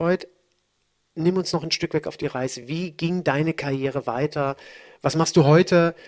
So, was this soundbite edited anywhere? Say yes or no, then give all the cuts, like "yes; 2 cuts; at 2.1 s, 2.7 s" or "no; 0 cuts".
no; 0 cuts